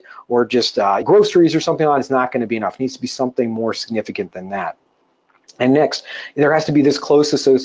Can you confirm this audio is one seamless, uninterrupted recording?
no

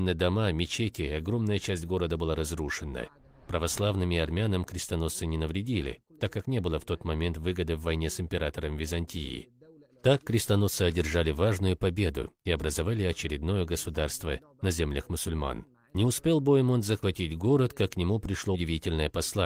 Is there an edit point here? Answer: yes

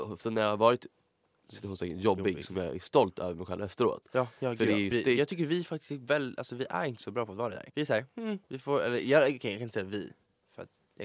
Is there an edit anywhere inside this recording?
yes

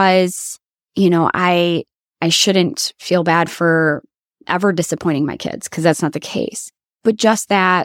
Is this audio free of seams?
yes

